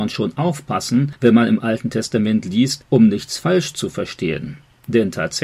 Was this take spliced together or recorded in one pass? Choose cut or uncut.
uncut